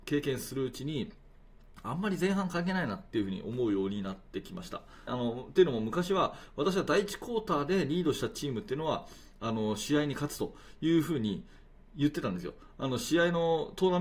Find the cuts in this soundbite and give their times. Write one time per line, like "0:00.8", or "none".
0:05.1